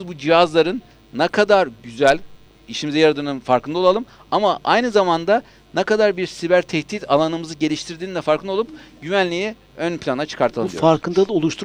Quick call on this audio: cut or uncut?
uncut